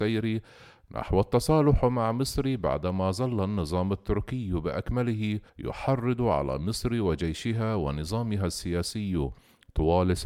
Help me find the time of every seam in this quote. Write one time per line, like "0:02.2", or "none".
0:05.5